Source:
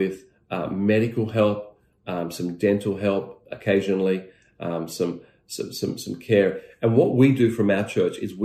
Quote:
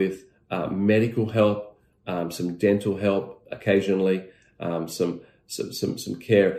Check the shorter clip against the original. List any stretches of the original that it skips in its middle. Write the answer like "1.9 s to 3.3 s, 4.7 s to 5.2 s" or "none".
none